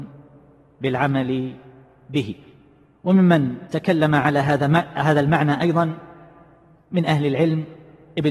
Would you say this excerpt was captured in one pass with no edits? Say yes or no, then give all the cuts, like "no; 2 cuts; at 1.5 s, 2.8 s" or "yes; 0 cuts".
yes; 0 cuts